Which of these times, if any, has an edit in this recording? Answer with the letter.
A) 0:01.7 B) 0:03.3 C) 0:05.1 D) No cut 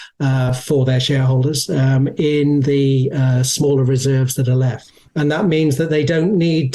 C